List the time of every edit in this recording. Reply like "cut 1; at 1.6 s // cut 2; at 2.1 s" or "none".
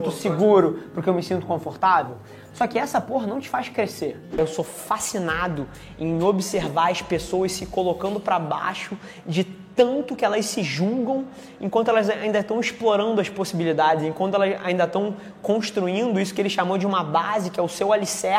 none

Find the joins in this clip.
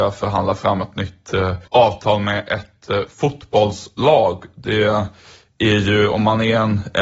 cut 1; at 1.7 s

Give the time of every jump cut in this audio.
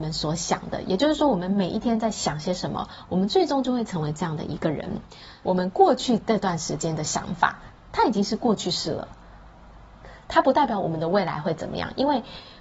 cut 1; at 5.4 s // cut 2; at 7.9 s

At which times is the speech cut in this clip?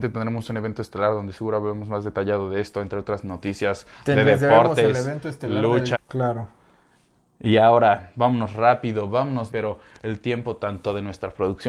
cut 1; at 5.9 s // cut 2; at 9.5 s

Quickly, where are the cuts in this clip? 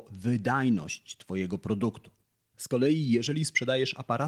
cut 1; at 2.5 s

